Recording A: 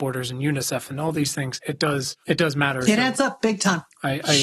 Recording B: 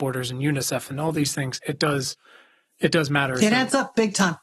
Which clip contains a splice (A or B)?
A